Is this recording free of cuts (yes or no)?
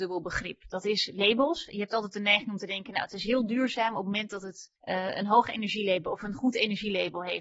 no